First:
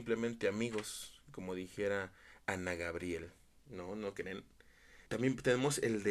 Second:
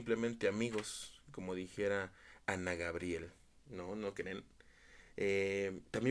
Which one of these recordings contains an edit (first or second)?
first